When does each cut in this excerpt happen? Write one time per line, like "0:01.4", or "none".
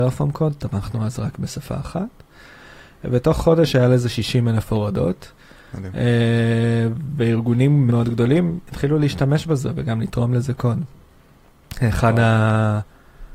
0:07.9